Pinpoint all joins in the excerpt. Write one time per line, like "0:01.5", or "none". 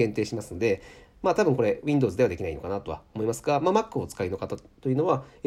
none